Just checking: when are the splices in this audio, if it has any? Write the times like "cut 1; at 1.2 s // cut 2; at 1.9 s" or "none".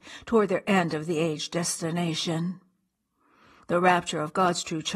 none